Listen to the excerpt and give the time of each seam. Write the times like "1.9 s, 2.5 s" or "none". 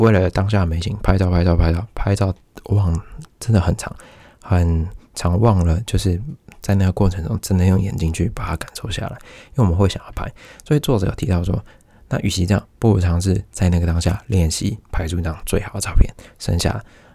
none